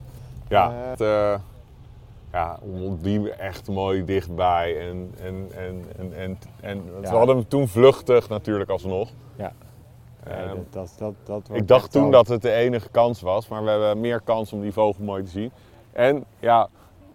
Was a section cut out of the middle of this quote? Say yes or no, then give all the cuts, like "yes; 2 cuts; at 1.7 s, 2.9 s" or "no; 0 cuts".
yes; 1 cut; at 0.9 s